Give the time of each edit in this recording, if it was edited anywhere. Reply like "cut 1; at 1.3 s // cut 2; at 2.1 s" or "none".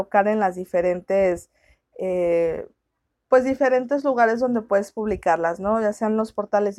none